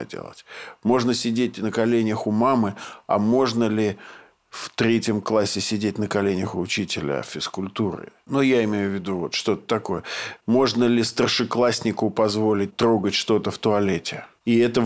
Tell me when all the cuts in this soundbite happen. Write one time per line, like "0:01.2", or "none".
none